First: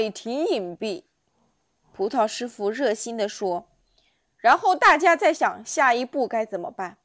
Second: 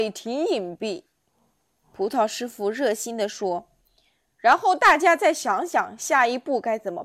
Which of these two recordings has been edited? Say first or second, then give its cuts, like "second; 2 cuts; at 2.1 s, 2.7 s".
first; 1 cut; at 5.3 s